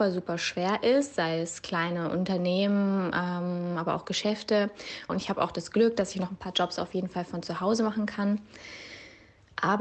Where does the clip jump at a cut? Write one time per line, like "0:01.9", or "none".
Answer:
0:05.1